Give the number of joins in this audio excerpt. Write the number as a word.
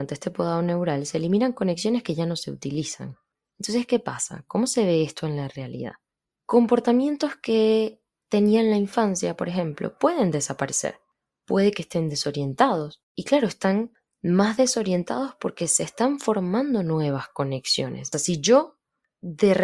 one